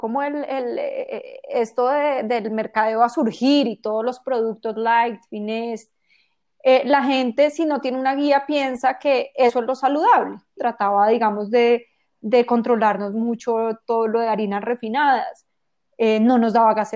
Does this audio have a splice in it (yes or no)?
yes